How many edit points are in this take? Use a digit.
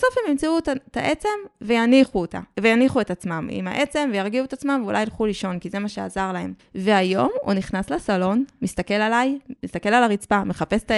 1